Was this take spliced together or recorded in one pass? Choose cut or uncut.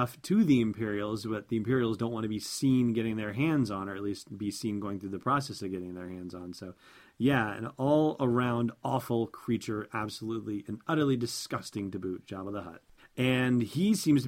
cut